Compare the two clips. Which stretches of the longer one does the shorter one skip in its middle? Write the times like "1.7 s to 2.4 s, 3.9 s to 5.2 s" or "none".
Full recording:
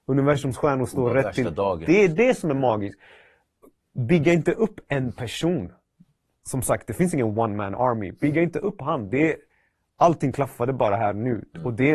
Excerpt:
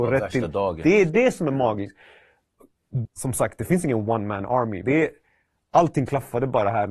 4.1 s to 6.3 s, 8.1 s to 9.1 s